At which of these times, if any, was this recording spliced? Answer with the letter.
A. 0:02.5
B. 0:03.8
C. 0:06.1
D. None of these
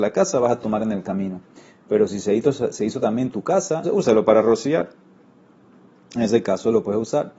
B